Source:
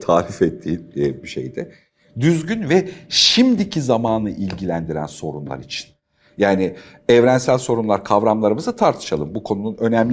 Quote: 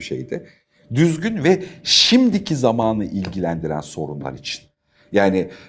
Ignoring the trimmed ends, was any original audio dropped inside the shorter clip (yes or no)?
no